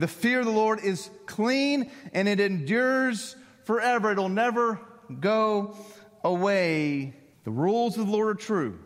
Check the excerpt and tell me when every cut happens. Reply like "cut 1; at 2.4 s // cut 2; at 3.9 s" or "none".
cut 1; at 7.3 s